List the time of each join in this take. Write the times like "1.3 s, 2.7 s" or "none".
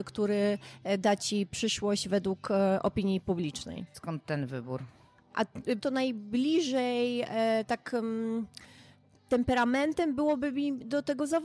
3.9 s, 5.8 s